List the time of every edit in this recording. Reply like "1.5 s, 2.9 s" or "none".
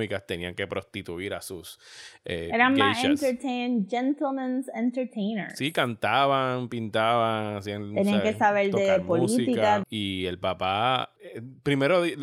9.8 s, 11.2 s